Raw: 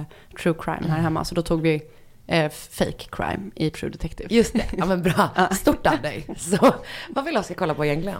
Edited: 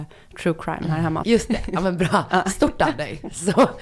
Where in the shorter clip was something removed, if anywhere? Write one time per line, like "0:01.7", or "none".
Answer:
0:01.2